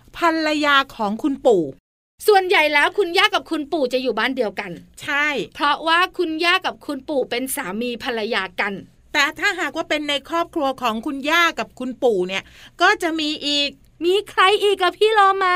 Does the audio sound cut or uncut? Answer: uncut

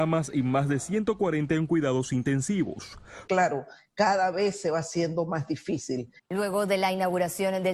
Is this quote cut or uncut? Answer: cut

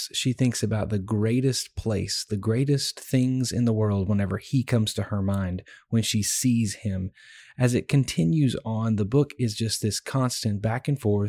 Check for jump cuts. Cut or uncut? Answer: uncut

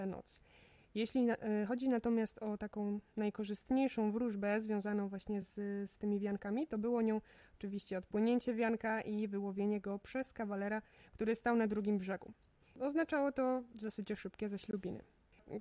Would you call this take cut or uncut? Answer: uncut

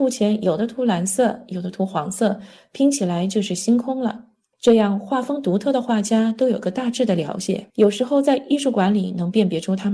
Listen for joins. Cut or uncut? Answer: cut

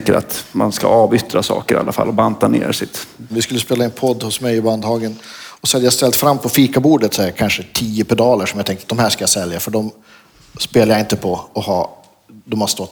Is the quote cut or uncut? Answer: cut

